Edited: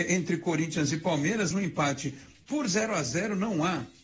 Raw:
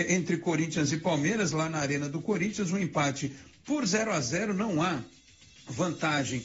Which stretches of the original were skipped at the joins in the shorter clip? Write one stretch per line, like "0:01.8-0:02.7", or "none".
0:01.5-0:02.7